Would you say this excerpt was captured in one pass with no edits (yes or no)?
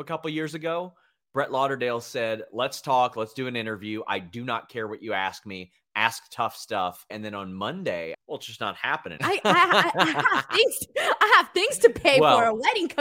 no